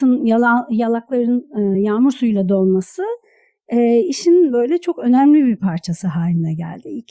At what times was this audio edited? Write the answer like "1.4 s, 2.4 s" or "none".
none